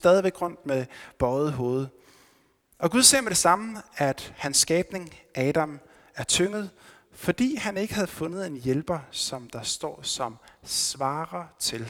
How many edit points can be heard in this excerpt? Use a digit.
0